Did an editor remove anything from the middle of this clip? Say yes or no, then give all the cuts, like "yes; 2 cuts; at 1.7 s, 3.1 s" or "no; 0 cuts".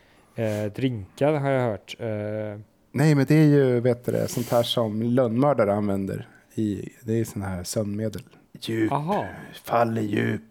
yes; 2 cuts; at 6.9 s, 8.4 s